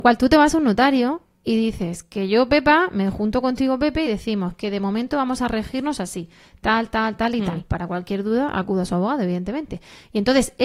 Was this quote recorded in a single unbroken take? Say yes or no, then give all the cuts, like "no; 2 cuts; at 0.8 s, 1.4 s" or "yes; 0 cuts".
yes; 0 cuts